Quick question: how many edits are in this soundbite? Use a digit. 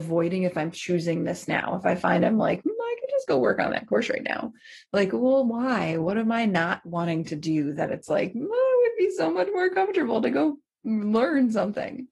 0